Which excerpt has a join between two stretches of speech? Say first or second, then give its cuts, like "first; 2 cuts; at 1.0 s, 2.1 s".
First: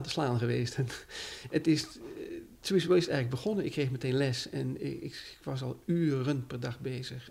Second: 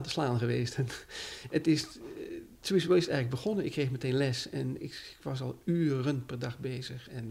second; 1 cut; at 4.8 s